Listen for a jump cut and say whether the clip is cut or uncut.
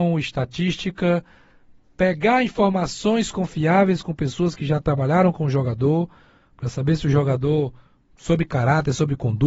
uncut